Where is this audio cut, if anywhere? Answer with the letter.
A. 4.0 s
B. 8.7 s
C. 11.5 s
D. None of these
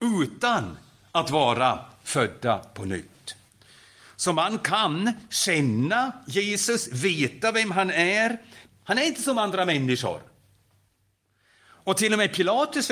B